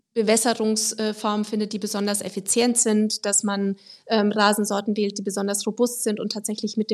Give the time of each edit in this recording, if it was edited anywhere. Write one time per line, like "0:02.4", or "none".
none